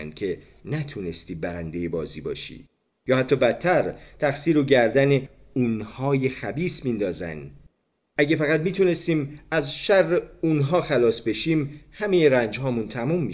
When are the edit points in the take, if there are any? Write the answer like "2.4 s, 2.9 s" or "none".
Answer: none